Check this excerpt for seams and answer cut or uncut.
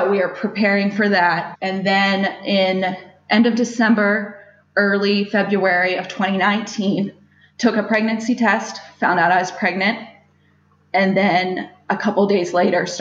uncut